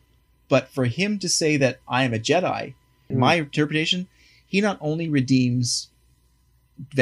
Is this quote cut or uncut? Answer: uncut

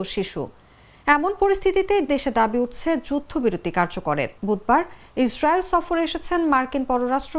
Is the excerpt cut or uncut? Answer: cut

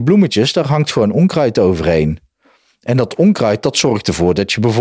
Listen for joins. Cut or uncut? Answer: uncut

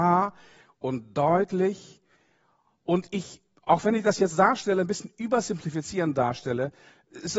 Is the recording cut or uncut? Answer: uncut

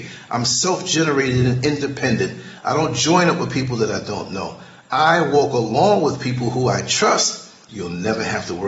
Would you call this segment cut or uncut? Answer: cut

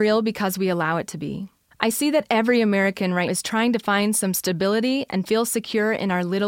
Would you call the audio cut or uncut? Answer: cut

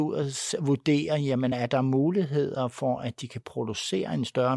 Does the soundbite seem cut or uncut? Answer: uncut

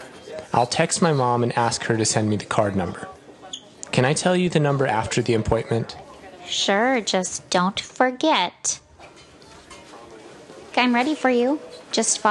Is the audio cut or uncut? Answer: cut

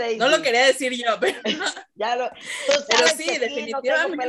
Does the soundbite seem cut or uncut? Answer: uncut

